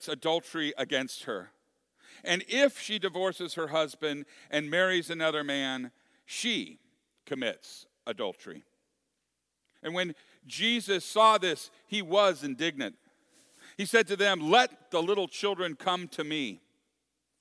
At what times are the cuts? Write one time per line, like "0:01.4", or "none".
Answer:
0:09.7